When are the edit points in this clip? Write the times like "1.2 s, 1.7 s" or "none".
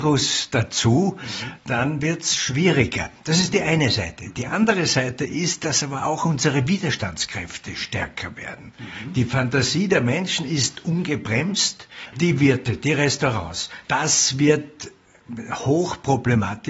1.6 s, 12.1 s, 13.9 s